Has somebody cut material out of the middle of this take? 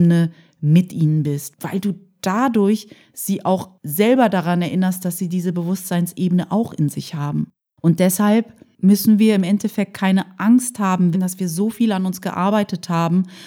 yes; 2 cuts; at 7.7 s, 11.1 s

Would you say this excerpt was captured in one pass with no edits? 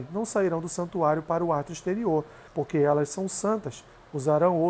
no; 1 cut; at 2.5 s

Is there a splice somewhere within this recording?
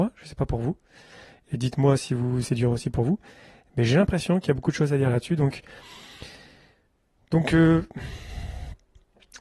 no; 0 cuts

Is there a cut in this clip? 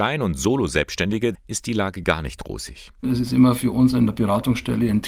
yes; 2 cuts; at 1.3 s, 3.0 s

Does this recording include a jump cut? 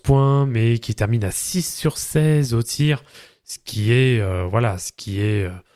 no; 0 cuts

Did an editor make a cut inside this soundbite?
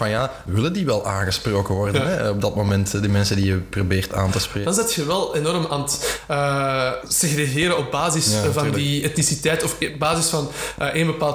yes; 2 cuts; at 4.6 s, 7.0 s

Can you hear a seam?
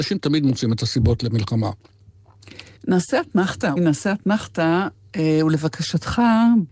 yes; 2 cuts; at 2.8 s, 3.8 s

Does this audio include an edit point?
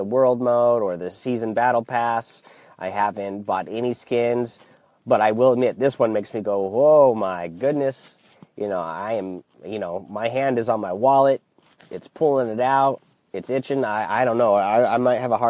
no; 0 cuts

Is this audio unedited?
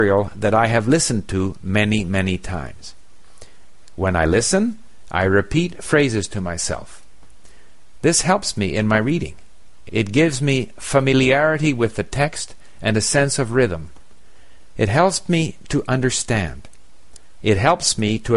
no; 1 cut; at 9.9 s

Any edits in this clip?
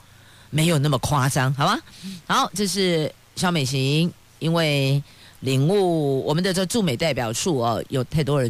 no; 0 cuts

